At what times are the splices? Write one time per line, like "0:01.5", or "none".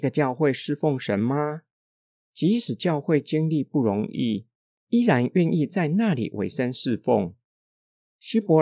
none